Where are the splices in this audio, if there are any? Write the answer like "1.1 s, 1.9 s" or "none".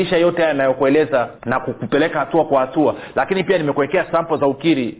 1.4 s